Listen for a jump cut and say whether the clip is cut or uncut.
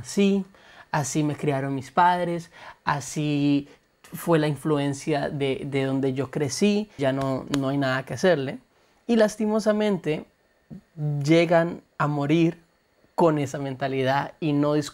cut